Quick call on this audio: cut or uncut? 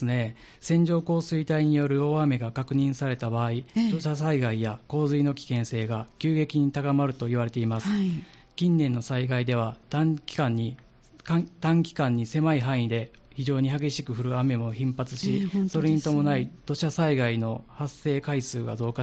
uncut